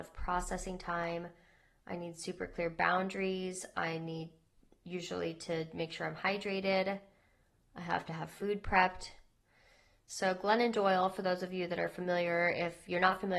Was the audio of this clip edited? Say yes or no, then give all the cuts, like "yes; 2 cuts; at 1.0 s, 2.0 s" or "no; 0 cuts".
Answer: no; 0 cuts